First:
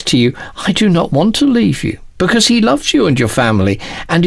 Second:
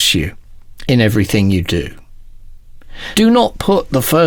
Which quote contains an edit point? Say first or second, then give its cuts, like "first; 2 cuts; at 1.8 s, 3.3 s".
second; 1 cut; at 3.1 s